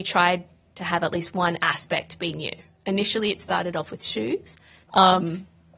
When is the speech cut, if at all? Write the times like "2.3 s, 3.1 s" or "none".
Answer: 4.9 s